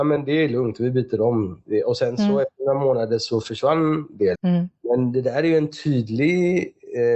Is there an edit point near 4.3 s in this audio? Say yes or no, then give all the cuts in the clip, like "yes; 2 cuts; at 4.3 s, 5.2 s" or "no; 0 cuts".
yes; 1 cut; at 4.3 s